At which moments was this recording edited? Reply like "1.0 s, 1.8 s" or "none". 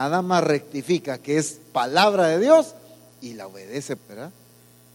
4.0 s